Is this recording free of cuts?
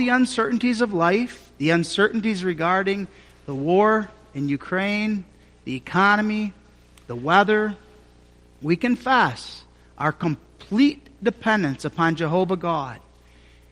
yes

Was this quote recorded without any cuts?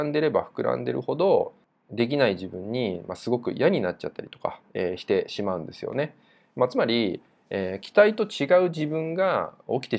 yes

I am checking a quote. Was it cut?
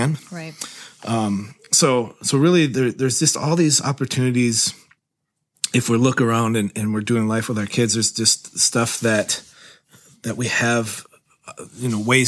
no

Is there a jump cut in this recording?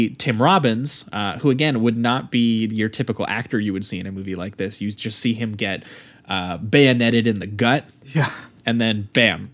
no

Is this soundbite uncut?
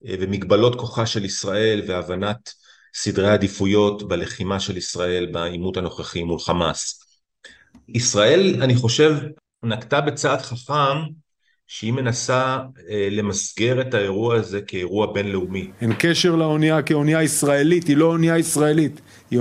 yes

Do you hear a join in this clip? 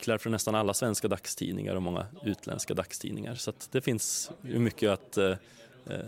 no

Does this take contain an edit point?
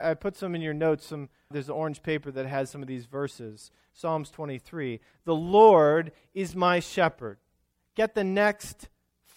yes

